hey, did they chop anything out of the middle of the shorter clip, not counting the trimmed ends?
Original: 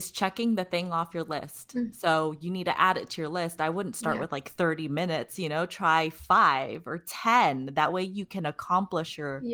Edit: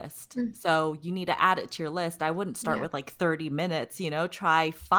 no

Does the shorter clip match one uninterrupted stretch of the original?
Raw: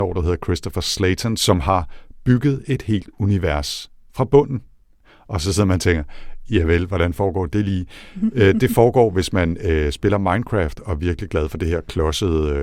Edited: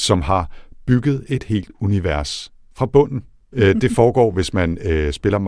no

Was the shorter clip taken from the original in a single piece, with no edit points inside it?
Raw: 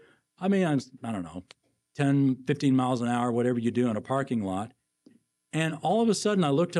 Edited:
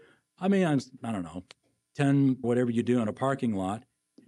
no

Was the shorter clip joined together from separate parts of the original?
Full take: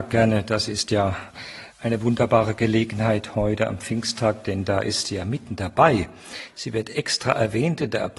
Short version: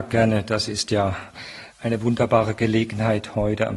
no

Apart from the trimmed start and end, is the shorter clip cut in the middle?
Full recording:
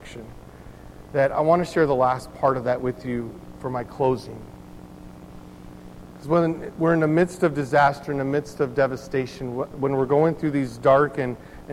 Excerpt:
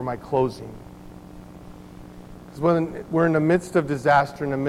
no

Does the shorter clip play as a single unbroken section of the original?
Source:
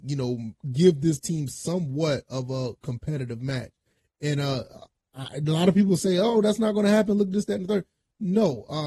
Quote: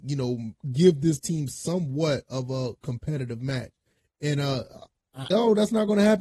no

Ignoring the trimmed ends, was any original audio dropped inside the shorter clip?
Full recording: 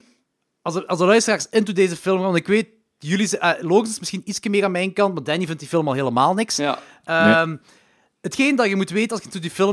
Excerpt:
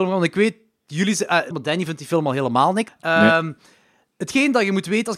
yes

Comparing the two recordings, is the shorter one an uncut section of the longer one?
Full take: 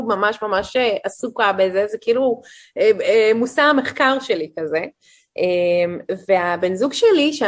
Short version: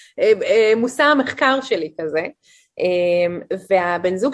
yes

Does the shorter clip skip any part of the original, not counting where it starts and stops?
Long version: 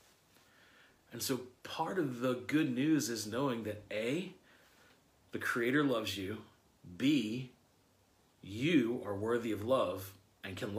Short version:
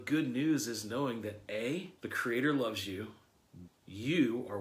yes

